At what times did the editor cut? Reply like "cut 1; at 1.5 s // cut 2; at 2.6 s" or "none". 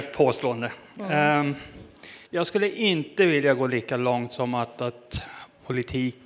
cut 1; at 2.3 s